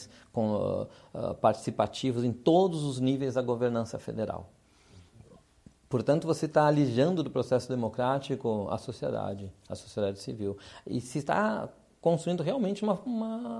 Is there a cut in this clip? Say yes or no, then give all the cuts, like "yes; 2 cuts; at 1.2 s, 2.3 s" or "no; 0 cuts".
yes; 1 cut; at 5.8 s